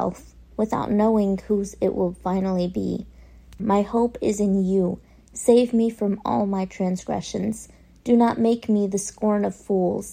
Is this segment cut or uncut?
cut